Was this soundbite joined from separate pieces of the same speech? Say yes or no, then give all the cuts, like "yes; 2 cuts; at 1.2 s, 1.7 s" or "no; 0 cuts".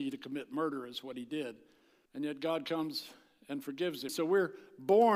yes; 2 cuts; at 2.1 s, 4.1 s